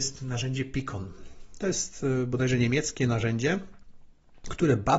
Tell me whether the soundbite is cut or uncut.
uncut